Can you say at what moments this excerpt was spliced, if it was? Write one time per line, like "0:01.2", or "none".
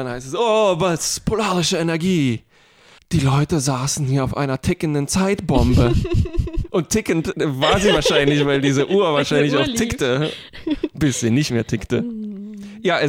none

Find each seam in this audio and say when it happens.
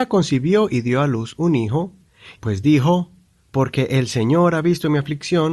0:02.4

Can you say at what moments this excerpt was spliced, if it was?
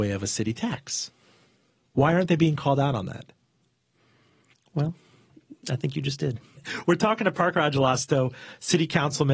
0:06.6

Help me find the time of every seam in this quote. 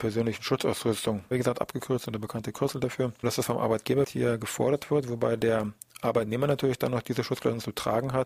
0:01.3
0:03.2

